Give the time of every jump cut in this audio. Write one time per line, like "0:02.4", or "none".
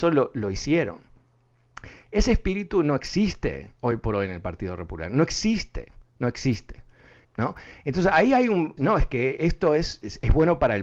0:07.2
0:08.8